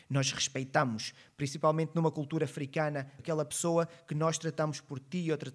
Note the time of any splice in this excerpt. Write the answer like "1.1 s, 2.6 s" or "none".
3.2 s